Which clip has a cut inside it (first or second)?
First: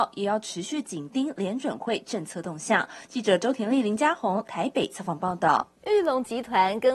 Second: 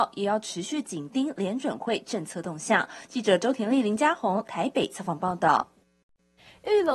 first